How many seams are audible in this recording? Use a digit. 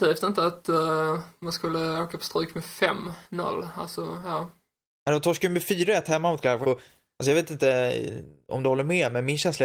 1